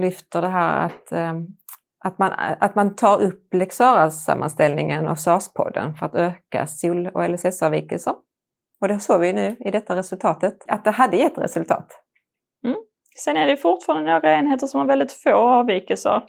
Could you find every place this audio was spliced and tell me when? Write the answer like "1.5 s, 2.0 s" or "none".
10.7 s